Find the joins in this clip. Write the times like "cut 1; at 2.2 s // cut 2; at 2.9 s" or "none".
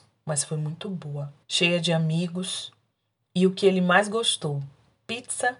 cut 1; at 1.4 s